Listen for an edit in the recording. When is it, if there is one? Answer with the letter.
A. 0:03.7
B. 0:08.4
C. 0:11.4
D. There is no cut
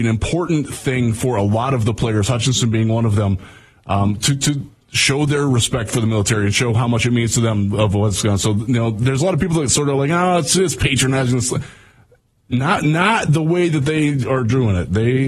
D